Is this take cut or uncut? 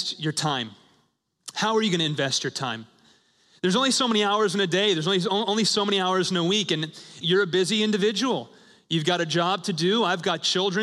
cut